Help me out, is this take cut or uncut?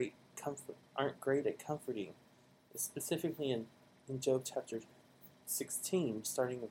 uncut